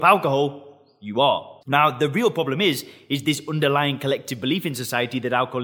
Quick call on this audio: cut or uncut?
cut